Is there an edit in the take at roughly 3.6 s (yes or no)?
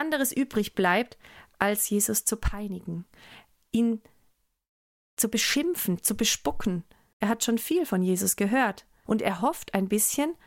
no